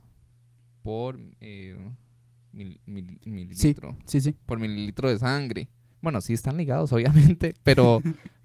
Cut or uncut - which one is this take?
cut